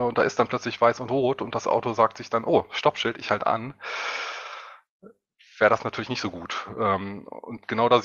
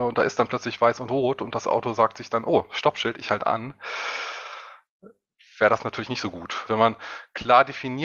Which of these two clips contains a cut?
second; 1 cut; at 6.7 s

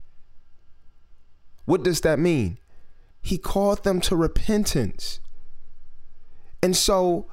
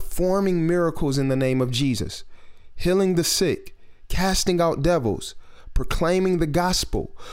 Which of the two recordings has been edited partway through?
first; 2 cuts; at 1.6 s, 3.1 s

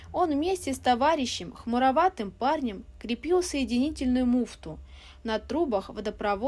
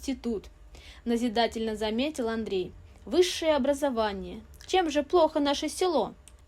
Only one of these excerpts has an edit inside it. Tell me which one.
second; 1 cut; at 4.7 s

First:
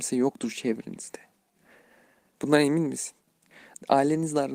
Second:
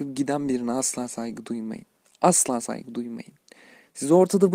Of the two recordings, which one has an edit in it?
first; 1 cut; at 2.3 s

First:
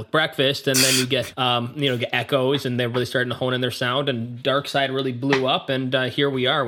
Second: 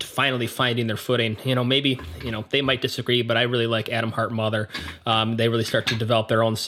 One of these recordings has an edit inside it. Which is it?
first; 1 cut; at 1.3 s

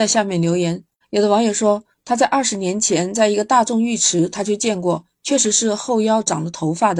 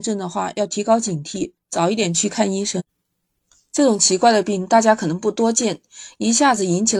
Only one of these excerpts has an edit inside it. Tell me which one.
first; 1 cut; at 1.0 s

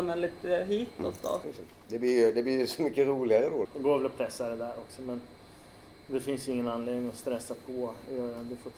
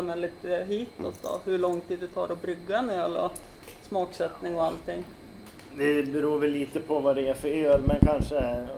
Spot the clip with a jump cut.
first; 2 cuts; at 1.4 s, 3.6 s

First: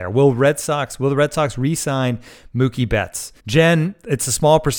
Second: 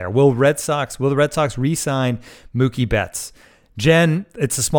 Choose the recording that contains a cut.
first; 1 cut; at 3.4 s

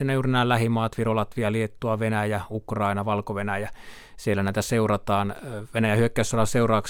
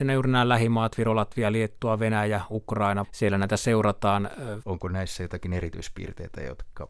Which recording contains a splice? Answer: second; 2 cuts; at 3.0 s, 4.6 s

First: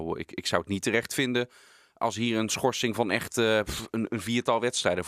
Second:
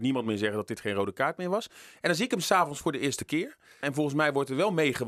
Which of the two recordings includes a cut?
second; 1 cut; at 3.8 s

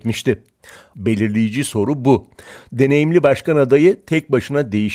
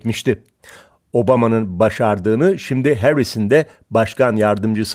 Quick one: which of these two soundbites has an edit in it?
first; 2 cuts; at 0.9 s, 2.7 s

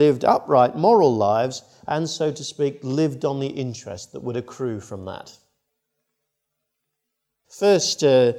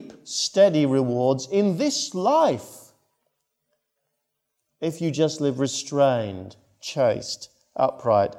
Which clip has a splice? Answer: first; 1 cut; at 7.4 s

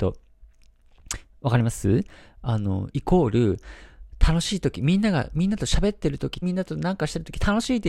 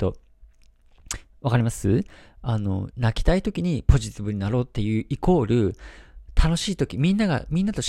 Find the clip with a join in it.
first; 2 cuts; at 2.9 s, 6.4 s

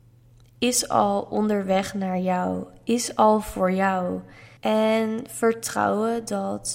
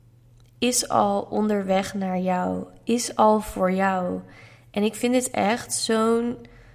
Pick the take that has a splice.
first; 1 cut; at 4.6 s

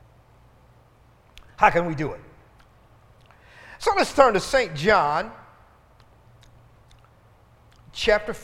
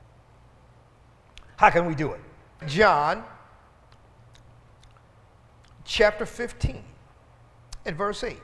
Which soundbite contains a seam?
second; 1 cut; at 2.6 s

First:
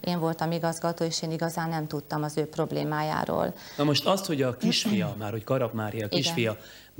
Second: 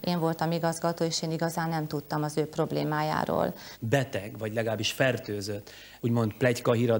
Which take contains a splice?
second; 2 cuts; at 3.7 s, 6.0 s

